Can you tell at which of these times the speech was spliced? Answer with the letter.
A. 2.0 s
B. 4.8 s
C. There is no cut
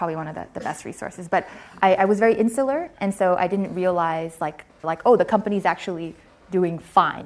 B